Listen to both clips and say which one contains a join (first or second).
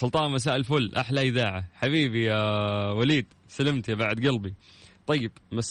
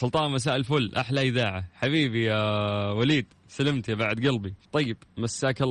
second